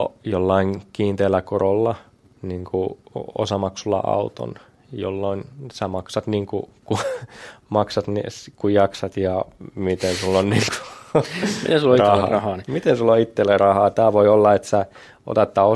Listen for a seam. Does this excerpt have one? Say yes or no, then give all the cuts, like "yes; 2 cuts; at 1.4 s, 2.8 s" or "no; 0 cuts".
no; 0 cuts